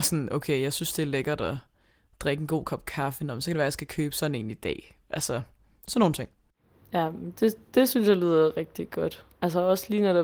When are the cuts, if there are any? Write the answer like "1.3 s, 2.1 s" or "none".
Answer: none